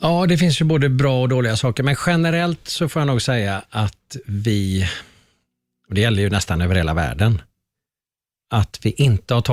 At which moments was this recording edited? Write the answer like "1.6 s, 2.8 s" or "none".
none